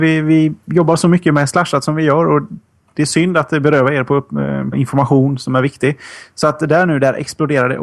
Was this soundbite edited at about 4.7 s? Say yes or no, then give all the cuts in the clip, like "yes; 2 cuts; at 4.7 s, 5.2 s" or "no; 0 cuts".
yes; 1 cut; at 4.7 s